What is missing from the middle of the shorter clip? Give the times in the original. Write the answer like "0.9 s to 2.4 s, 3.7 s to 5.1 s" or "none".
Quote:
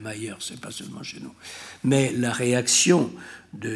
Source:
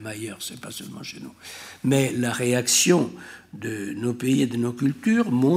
none